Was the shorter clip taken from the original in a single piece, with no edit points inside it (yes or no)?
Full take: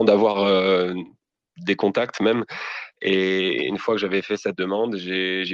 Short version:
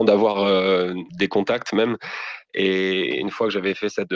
no